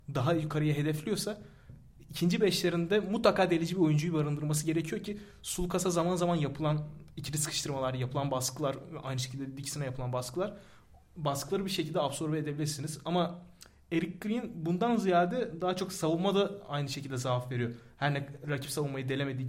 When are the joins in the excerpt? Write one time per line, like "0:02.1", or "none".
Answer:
0:18.4